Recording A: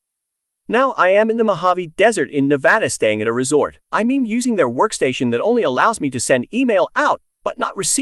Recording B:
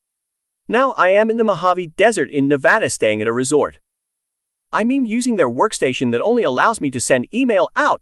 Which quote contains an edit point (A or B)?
A